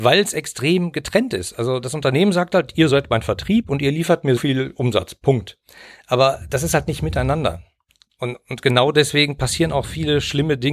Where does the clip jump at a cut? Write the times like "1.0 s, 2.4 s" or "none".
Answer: 4.4 s, 9.8 s